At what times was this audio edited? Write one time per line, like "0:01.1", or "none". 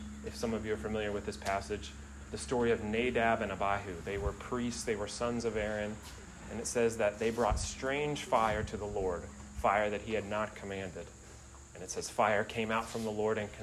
0:02.3